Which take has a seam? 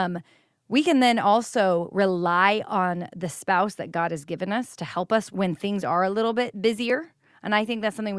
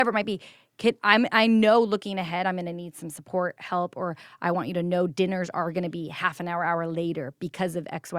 first; 1 cut; at 5.3 s

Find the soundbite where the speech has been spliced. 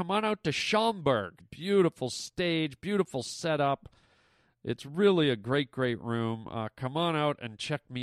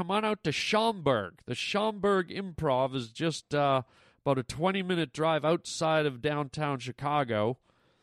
first; 1 cut; at 1.4 s

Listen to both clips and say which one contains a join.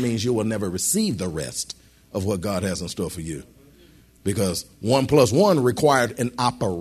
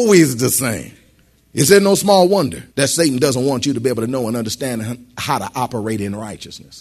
second; 2 cuts; at 1.4 s, 2.7 s

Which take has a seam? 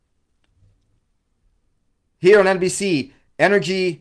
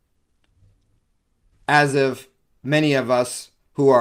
second; 1 cut; at 1.5 s

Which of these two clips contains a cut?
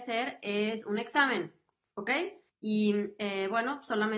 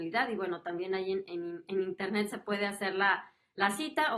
first; 1 cut; at 2.5 s

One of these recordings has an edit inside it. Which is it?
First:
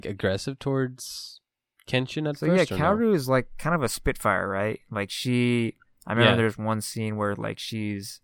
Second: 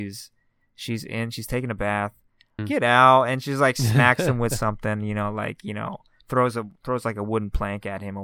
second; 1 cut; at 2.6 s

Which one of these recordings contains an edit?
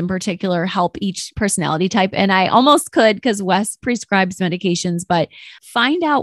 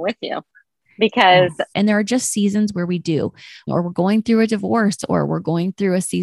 second; 2 cuts; at 1.7 s, 3.7 s

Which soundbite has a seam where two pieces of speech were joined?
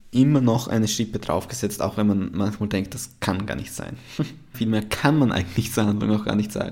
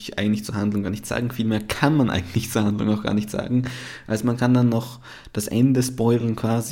first; 1 cut; at 4.5 s

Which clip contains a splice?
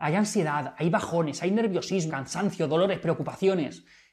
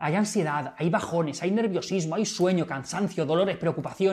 first; 1 cut; at 2.1 s

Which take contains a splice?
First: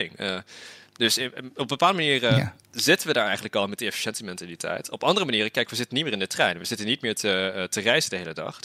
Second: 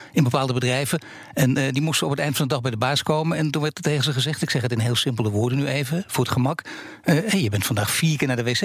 first; 1 cut; at 2.6 s

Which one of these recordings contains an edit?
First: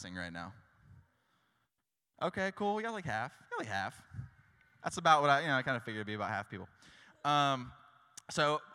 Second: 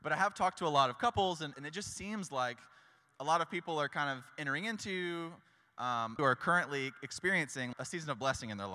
second; 3 cuts; at 1.5 s, 6.2 s, 7.7 s

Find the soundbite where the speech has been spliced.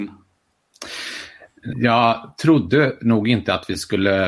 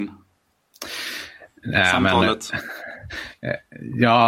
first; 1 cut; at 1.7 s

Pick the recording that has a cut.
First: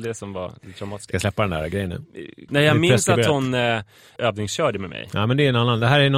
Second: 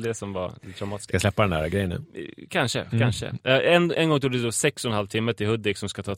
first; 2 cuts; at 2.5 s, 4.2 s

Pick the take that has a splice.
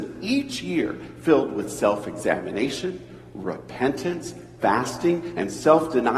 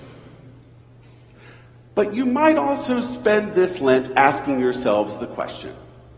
first; 1 cut; at 4.6 s

